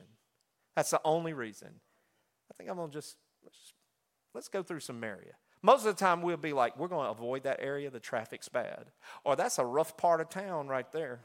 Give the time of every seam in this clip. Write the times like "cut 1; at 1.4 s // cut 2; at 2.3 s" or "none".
none